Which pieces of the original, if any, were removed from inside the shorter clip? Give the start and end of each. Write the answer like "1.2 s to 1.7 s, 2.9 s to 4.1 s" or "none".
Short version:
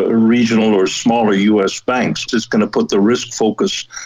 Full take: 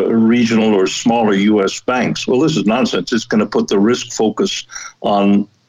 2.3 s to 3.0 s